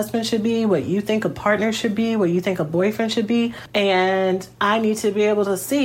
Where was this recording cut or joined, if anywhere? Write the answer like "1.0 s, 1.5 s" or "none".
3.7 s

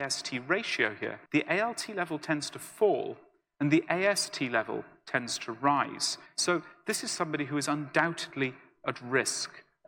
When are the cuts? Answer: 1.3 s, 6.3 s

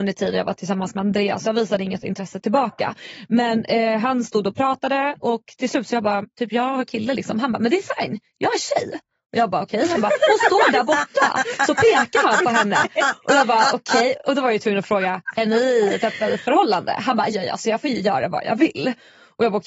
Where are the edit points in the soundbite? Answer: 6.2 s, 17.3 s

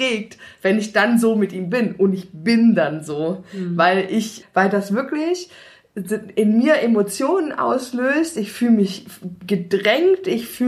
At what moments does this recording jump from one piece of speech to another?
4.4 s

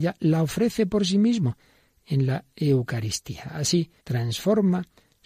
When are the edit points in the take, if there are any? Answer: 4.0 s

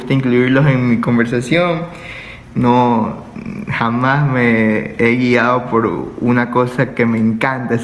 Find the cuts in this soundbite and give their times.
2.5 s

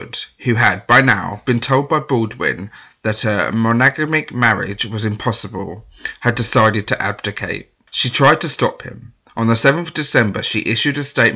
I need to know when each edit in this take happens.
none

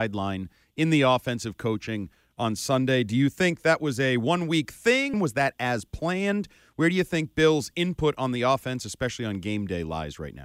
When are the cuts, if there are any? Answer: 5.1 s

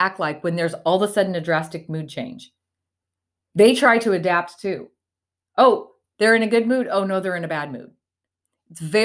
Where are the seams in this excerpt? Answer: none

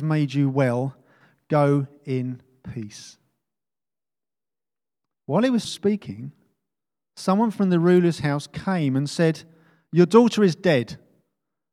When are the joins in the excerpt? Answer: 5.6 s

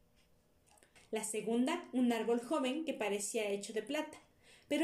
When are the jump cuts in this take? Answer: 1.0 s

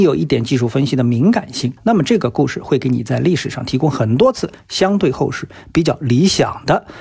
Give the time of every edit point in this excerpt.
1.8 s

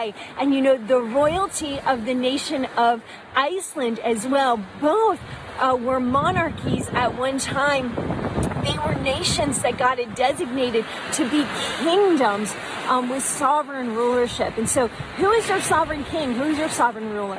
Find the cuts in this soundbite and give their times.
none

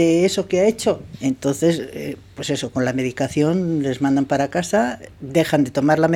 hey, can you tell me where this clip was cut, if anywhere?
1.1 s

